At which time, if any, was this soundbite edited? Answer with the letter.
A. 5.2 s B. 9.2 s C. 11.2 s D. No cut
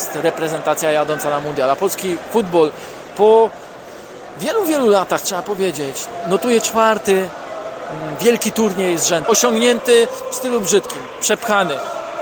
B